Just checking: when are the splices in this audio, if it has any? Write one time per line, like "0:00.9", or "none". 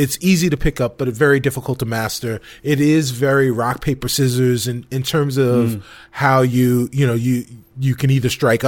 none